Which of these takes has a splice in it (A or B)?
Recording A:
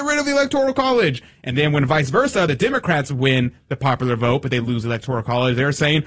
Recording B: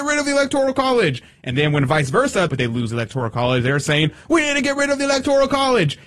B